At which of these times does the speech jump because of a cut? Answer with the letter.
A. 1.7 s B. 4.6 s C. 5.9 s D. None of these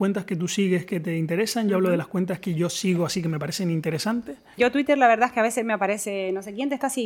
B